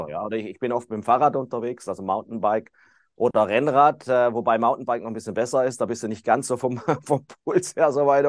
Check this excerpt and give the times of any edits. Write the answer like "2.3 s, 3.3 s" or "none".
none